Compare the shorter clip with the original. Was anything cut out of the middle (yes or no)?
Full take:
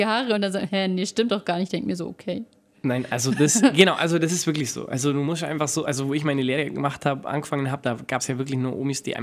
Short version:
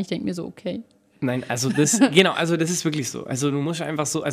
no